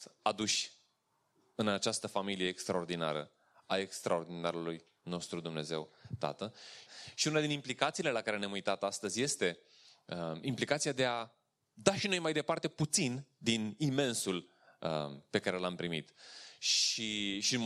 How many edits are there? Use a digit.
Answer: 1